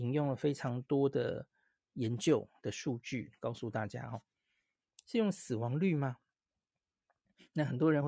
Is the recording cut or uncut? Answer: cut